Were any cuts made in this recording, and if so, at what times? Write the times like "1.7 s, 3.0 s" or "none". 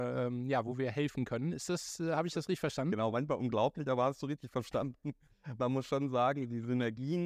none